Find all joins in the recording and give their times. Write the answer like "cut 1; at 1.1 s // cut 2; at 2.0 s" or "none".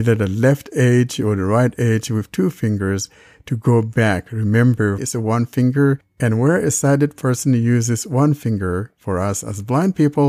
cut 1; at 5.0 s